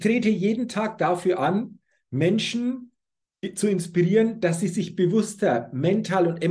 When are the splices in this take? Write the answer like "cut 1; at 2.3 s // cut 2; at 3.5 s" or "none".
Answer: none